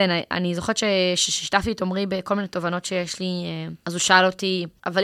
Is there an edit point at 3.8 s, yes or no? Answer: yes